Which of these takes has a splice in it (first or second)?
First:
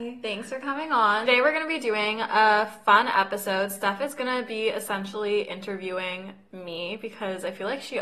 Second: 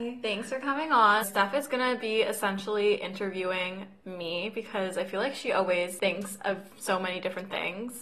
second